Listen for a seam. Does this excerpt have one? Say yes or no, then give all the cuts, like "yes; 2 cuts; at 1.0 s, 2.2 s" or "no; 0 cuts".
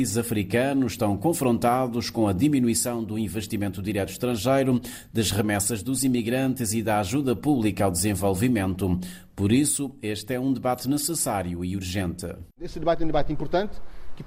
no; 0 cuts